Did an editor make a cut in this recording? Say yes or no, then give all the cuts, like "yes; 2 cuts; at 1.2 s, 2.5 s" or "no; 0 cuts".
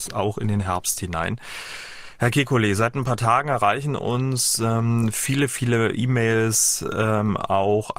no; 0 cuts